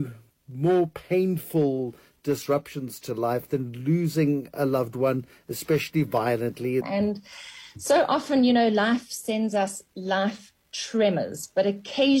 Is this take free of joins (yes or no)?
no